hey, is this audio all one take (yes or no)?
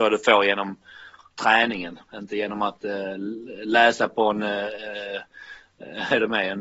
yes